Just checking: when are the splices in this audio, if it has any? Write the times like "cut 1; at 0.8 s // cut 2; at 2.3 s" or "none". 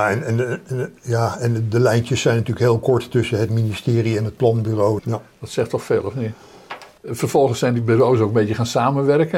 cut 1; at 5.0 s // cut 2; at 7.0 s